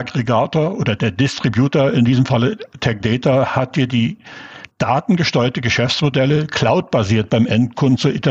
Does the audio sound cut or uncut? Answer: cut